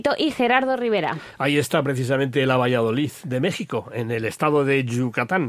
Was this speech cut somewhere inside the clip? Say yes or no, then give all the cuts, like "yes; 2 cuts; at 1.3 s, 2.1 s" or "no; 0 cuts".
no; 0 cuts